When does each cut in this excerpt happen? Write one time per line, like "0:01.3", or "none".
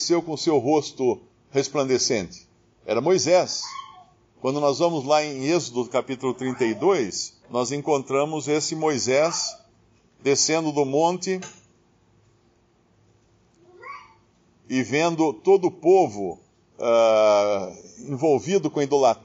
0:02.7
0:07.4